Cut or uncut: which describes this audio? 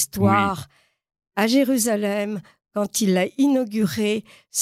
uncut